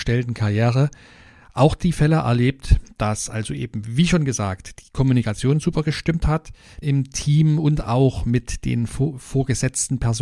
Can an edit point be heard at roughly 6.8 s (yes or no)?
yes